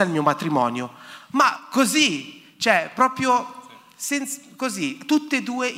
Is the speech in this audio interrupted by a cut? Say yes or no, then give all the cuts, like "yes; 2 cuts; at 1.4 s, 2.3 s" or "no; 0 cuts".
no; 0 cuts